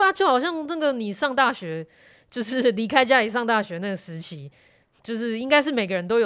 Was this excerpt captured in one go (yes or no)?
yes